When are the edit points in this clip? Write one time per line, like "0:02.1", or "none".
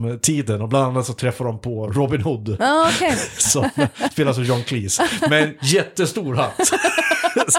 none